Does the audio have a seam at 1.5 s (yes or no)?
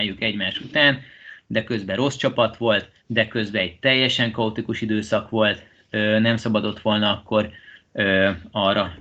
no